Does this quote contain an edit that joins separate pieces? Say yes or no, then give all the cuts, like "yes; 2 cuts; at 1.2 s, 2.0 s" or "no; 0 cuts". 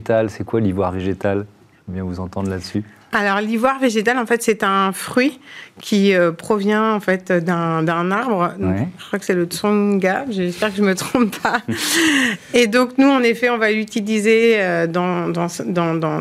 no; 0 cuts